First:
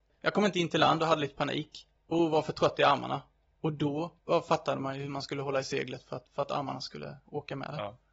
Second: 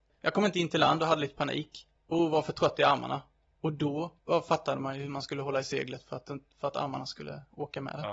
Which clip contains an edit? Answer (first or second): first